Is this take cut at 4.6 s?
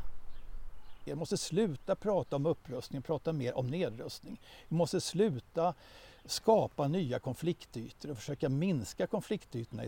no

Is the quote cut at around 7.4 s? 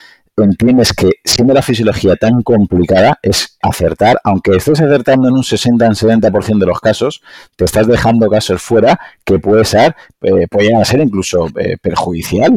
no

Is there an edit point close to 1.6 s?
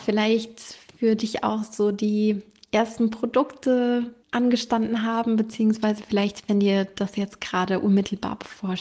no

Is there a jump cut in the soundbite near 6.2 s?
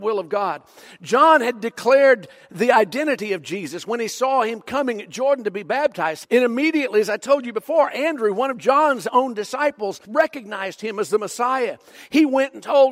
yes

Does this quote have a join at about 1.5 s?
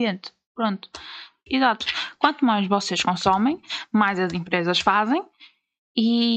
yes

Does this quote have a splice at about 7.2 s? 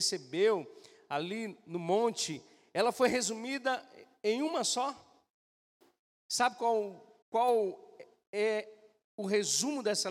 yes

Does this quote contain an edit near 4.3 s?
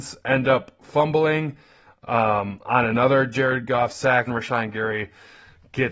yes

